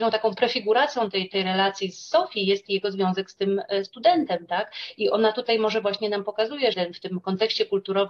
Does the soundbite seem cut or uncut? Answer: cut